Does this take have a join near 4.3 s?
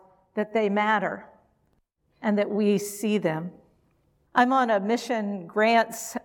yes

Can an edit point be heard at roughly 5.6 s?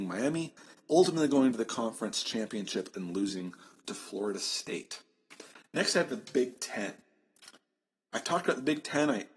no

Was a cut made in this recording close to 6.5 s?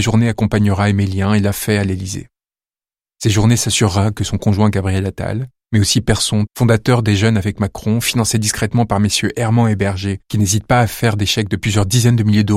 yes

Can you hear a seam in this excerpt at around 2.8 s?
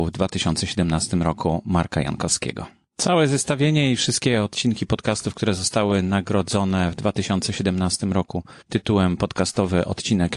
no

